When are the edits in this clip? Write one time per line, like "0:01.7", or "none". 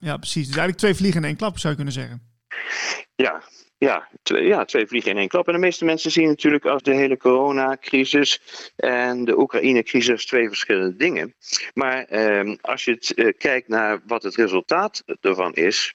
0:06.8